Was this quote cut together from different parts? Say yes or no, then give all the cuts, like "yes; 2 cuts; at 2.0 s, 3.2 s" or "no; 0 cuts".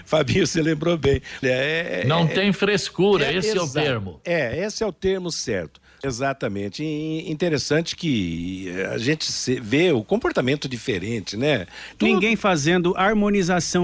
yes; 3 cuts; at 1.4 s, 6.0 s, 11.9 s